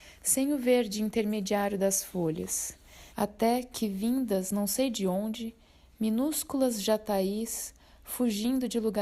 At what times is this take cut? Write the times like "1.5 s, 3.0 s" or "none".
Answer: 3.1 s